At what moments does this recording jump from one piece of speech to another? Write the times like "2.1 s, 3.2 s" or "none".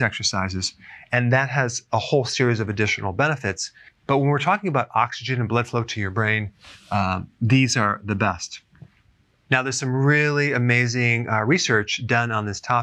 none